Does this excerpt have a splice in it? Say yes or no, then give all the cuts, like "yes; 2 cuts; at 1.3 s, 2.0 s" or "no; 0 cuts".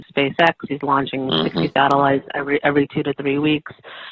no; 0 cuts